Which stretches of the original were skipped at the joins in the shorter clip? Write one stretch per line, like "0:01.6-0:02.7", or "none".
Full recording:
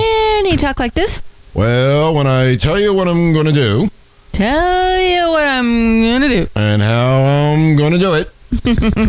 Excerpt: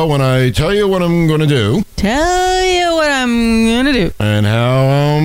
0:04.0-0:04.3